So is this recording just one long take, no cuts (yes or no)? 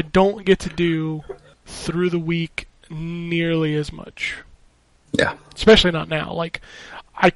yes